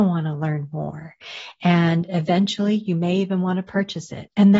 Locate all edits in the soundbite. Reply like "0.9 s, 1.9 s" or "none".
none